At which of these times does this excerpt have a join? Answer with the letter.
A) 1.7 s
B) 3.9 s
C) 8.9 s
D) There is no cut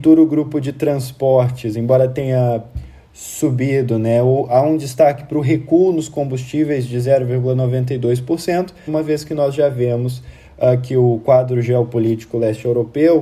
C